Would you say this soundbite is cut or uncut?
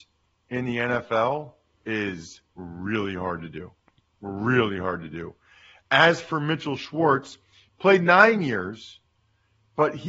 cut